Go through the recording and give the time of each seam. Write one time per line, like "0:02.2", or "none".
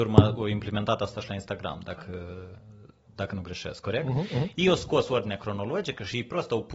none